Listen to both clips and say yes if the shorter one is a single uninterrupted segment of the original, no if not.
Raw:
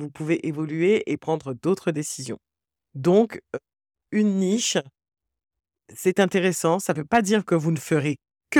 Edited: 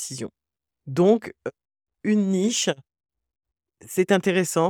yes